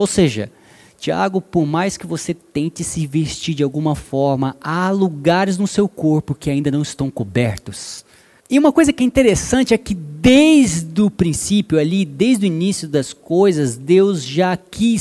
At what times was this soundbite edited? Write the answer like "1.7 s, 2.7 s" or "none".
8.4 s